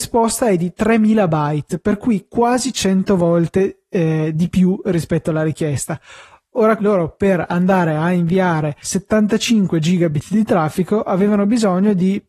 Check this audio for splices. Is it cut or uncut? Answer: cut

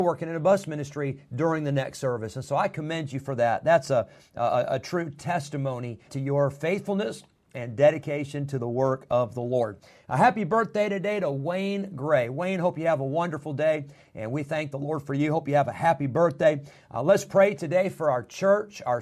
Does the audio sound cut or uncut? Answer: cut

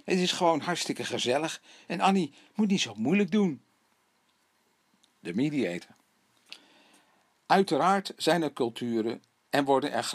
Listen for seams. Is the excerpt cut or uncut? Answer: uncut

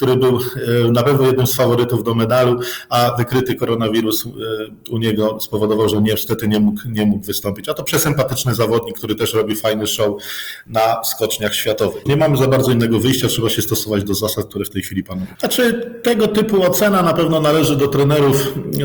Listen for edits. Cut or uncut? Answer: cut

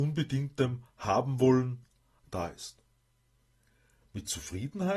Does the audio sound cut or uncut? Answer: cut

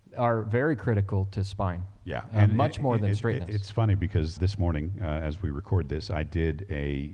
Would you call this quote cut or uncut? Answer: cut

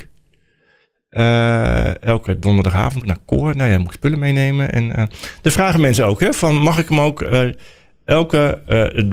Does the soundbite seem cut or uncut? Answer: cut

